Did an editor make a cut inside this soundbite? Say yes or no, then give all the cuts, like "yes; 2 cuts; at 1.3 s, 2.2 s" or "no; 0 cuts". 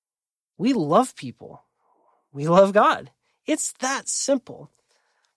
no; 0 cuts